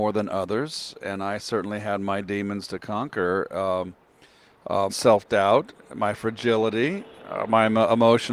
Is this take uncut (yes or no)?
no